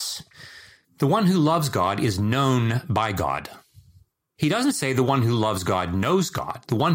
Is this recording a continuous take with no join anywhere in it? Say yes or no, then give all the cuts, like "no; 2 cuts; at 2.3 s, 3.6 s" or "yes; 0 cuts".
yes; 0 cuts